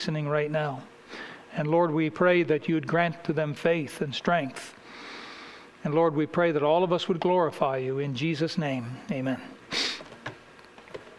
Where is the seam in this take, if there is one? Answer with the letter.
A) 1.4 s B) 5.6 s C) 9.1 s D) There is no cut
D